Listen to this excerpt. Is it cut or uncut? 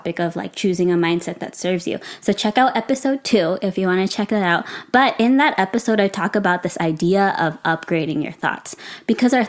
uncut